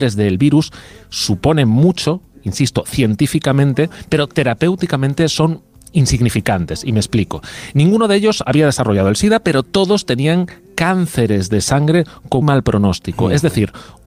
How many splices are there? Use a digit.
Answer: 1